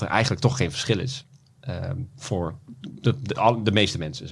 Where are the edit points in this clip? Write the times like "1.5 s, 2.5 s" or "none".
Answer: none